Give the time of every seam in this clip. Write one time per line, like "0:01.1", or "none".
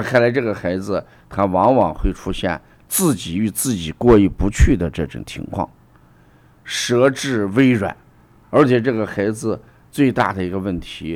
0:08.4